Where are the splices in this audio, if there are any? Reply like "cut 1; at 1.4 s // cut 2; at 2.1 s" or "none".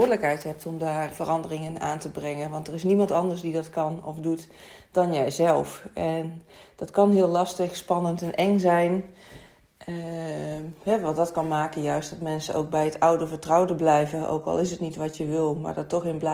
cut 1; at 1.1 s